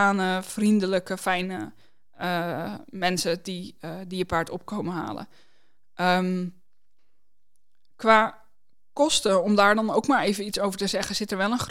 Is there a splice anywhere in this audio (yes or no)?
no